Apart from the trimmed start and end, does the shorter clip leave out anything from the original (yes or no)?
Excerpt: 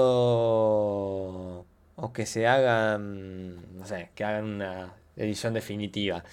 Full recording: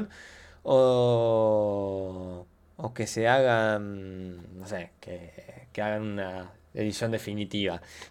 yes